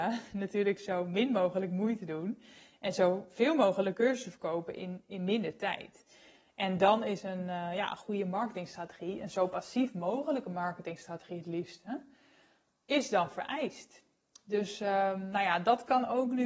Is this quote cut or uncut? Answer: uncut